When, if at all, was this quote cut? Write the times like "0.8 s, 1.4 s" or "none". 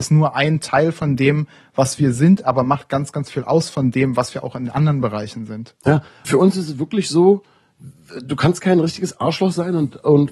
6.2 s